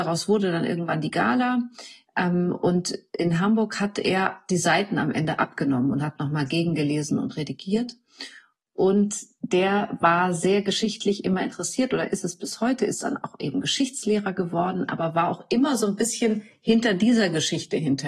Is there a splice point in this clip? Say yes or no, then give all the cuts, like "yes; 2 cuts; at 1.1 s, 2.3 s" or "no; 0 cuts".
no; 0 cuts